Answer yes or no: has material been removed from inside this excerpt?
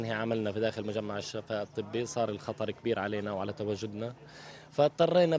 no